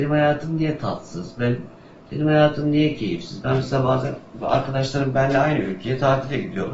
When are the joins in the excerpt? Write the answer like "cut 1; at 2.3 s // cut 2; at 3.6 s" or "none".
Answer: none